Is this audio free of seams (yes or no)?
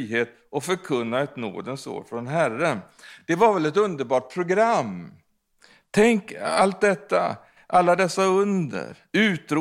yes